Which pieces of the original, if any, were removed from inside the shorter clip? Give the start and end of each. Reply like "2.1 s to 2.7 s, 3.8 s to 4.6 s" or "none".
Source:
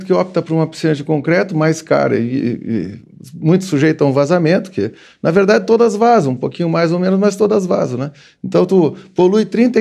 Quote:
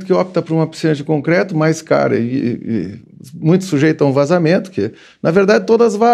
none